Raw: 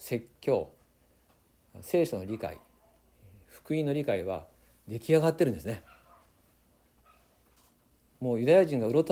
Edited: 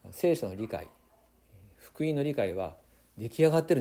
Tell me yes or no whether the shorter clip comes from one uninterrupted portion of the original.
yes